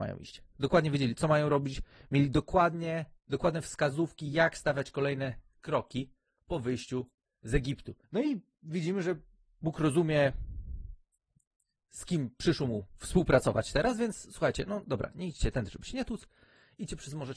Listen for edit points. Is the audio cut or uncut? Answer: cut